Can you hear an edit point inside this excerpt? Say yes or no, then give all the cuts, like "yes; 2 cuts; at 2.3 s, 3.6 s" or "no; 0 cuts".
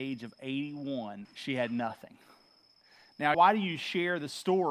yes; 2 cuts; at 1.2 s, 3.3 s